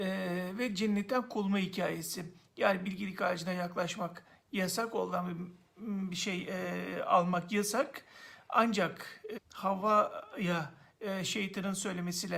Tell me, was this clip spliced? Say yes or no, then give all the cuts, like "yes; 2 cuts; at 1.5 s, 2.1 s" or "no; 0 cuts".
yes; 1 cut; at 9.3 s